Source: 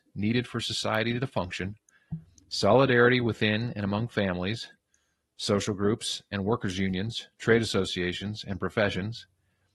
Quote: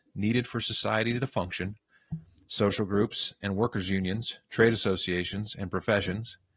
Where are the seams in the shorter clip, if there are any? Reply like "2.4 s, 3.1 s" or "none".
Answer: 2.5 s